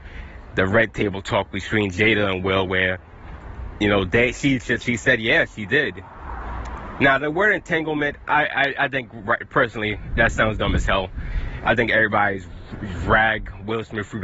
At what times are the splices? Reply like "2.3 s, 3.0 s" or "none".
none

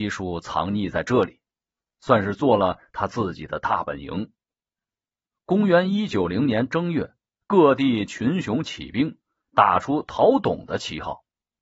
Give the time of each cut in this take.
5.3 s

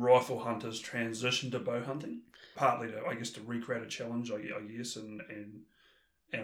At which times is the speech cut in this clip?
2.5 s

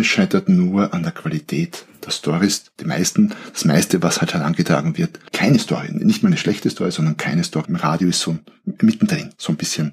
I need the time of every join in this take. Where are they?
5.3 s, 7.6 s

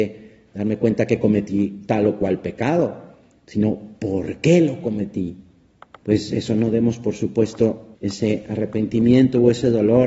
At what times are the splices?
5.9 s, 7.9 s

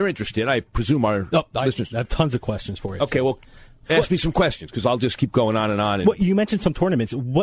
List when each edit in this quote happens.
none

